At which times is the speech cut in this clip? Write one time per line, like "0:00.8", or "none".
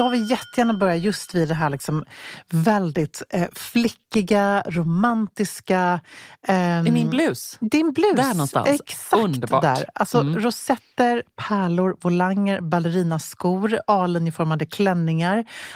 none